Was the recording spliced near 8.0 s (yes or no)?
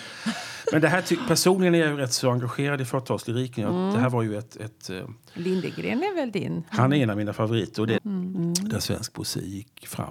yes